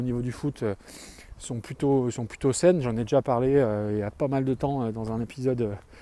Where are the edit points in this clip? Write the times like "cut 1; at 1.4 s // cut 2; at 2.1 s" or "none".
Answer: none